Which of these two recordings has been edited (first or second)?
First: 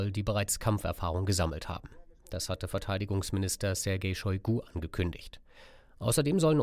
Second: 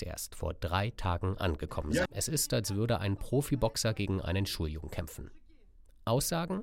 second